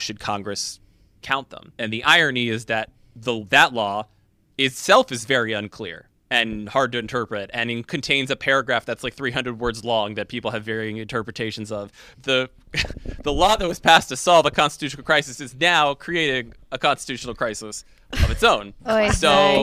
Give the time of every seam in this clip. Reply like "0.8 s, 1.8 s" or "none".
12.1 s